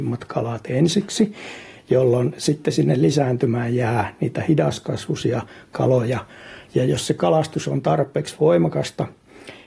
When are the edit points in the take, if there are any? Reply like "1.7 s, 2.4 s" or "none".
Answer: none